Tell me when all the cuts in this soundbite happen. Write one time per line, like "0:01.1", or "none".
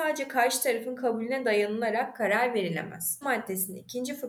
0:03.2

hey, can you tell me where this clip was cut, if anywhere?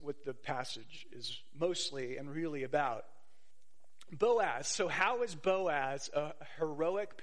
none

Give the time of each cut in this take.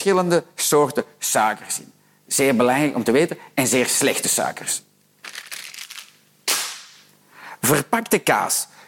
none

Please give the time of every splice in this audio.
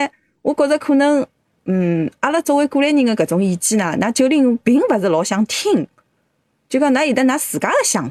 none

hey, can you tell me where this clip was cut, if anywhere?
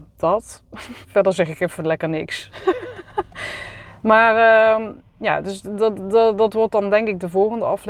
0:01.0

